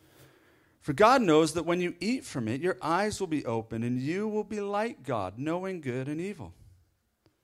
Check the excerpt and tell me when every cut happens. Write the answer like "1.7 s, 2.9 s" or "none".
none